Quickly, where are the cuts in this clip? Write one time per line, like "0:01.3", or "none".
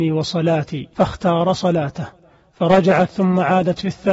0:00.9